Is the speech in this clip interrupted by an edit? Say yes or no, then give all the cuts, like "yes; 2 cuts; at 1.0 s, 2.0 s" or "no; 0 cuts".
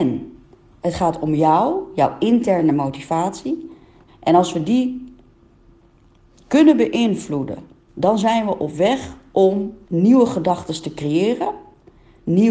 yes; 3 cuts; at 4.1 s, 7.9 s, 9.8 s